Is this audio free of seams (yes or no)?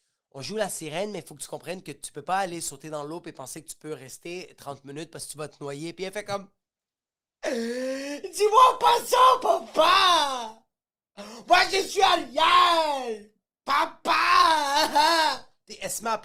yes